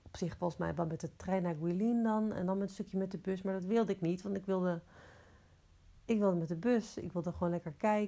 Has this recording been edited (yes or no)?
no